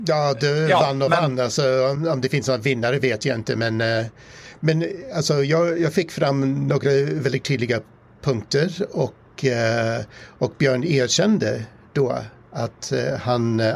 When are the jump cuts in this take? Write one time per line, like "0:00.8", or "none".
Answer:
none